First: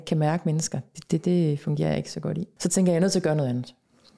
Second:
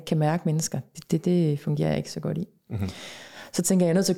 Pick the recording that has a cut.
first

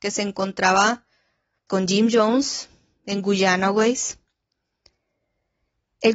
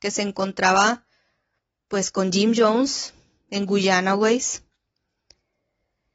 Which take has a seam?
first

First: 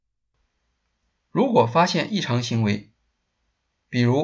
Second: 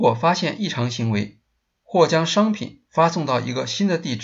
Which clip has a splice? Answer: second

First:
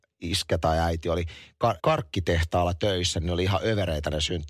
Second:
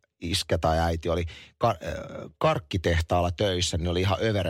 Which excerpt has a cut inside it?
first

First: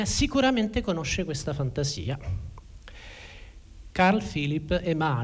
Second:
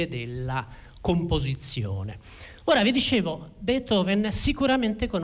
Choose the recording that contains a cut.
first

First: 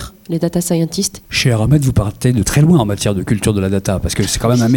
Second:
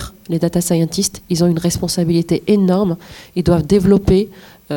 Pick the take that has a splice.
first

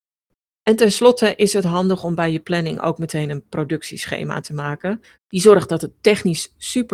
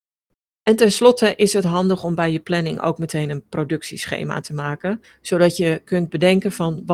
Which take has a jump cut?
first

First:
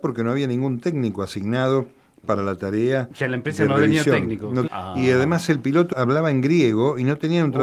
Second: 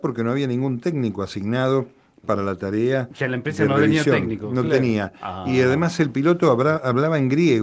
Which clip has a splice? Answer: first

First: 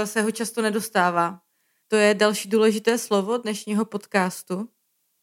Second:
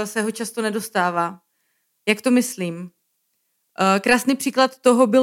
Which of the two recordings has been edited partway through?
first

